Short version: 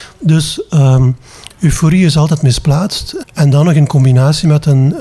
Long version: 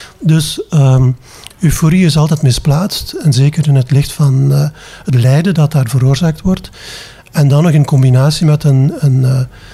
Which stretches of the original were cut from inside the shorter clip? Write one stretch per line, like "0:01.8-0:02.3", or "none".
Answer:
0:03.2-0:07.2